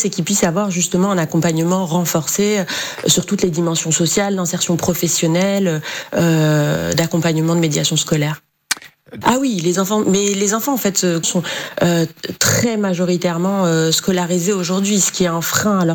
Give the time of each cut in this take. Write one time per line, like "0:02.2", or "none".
0:09.2
0:11.2